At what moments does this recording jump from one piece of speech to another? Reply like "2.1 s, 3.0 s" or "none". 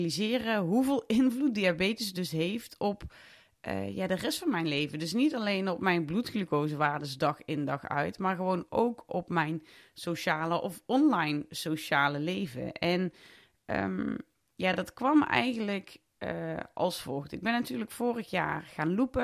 none